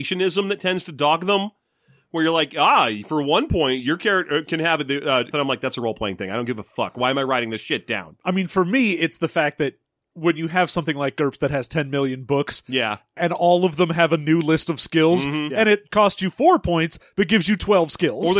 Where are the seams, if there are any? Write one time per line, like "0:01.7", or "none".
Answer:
0:05.3
0:15.5

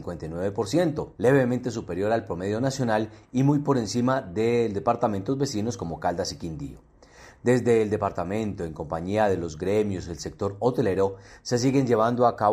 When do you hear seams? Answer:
0:01.1

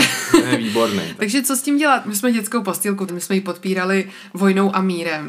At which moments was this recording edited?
0:02.0
0:03.1

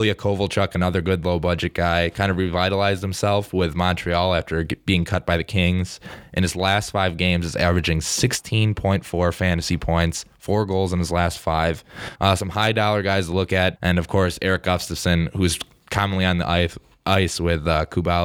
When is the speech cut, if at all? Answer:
0:12.2
0:13.8

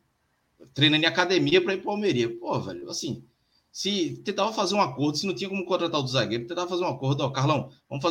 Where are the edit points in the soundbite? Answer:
none

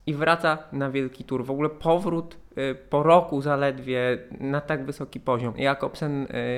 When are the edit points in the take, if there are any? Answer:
0:05.5

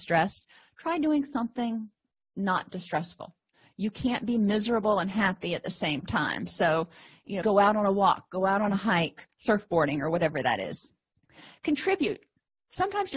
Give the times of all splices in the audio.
0:07.4
0:09.3

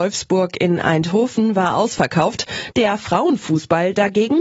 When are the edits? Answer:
0:02.7

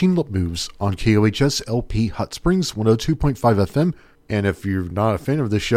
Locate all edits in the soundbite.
0:04.2

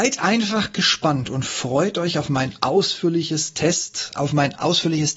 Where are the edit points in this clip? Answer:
none

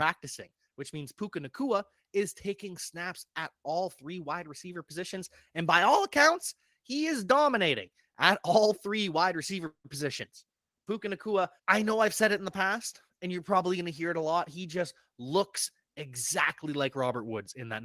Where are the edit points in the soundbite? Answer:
0:11.6

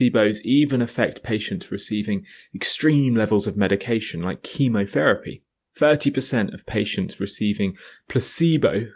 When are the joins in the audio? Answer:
none

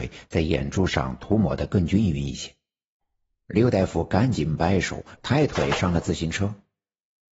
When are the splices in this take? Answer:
0:03.0
0:05.2

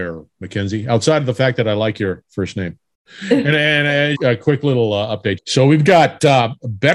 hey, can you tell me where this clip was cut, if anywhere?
0:04.1
0:05.4

